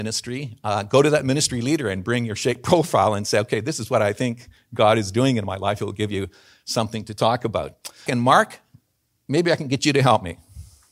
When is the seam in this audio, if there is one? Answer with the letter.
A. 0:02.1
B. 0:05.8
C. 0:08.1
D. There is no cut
C